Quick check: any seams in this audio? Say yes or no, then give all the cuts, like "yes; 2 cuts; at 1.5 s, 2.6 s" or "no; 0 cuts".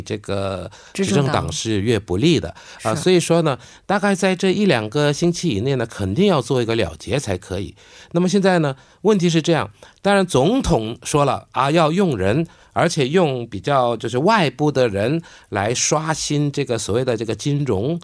no; 0 cuts